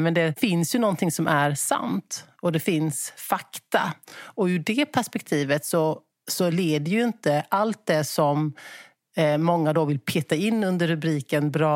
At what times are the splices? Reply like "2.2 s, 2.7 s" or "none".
none